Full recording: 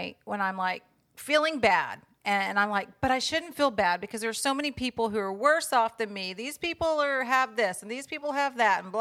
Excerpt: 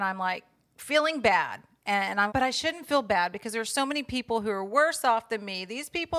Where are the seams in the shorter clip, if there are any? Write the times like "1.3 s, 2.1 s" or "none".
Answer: 2.3 s